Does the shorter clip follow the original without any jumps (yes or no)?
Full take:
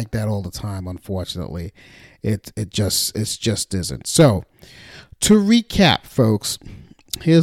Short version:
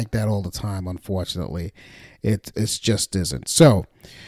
no